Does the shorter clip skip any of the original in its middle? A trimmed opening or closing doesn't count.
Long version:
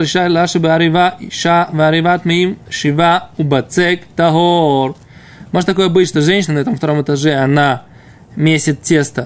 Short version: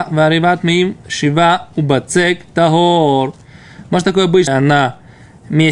yes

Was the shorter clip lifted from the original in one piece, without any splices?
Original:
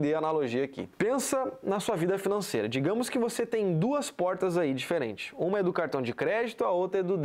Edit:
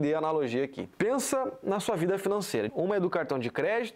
no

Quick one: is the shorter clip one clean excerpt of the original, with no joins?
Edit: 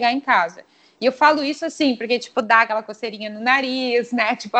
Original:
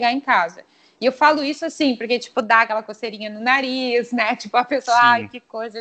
yes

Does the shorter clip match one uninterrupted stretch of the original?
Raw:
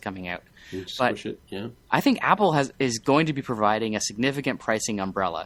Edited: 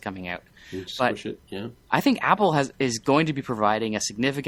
yes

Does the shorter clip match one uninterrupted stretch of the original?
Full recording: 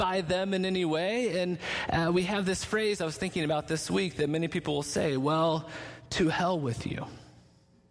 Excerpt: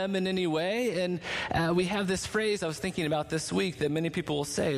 yes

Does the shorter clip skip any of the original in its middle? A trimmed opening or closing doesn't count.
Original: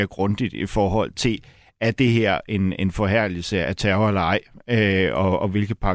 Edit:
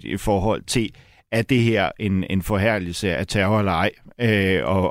no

